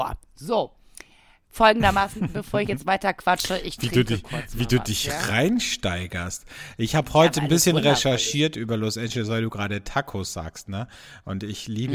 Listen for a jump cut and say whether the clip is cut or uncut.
uncut